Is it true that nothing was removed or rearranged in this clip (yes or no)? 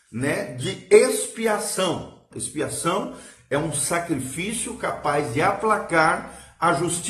no